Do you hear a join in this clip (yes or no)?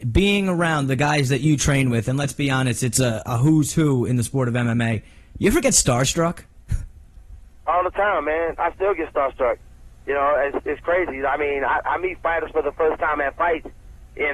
no